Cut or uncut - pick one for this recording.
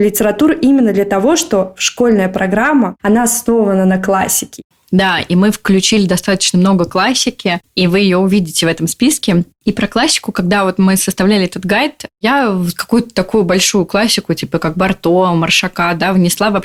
uncut